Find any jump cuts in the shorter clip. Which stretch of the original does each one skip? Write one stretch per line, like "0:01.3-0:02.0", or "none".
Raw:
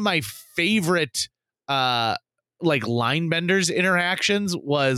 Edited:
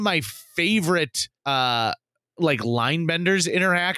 0:01.4-0:01.6